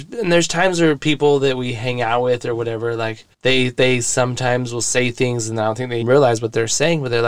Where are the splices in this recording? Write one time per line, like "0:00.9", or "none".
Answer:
0:03.3
0:06.0